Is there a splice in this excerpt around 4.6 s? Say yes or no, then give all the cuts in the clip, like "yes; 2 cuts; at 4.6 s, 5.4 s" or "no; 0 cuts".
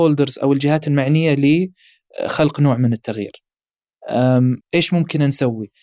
yes; 1 cut; at 4.6 s